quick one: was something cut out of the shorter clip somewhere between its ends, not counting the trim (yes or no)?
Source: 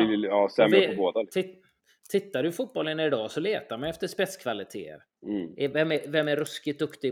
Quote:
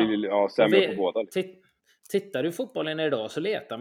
no